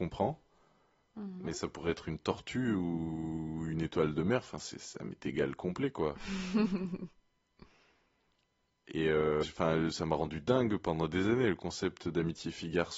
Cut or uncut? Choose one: cut